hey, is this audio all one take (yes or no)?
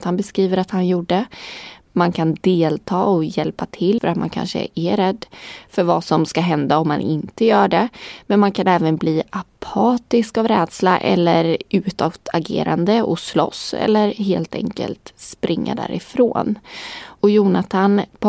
no